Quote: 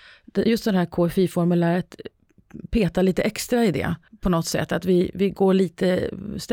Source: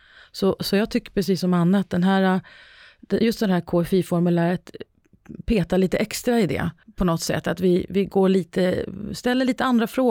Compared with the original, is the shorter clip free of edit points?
yes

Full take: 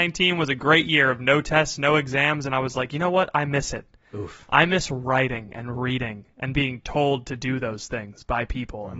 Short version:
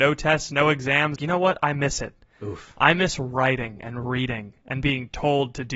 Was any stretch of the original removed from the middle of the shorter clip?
yes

